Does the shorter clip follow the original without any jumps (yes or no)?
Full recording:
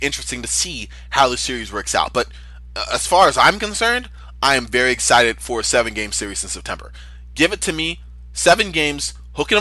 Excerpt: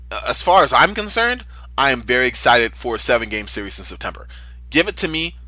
yes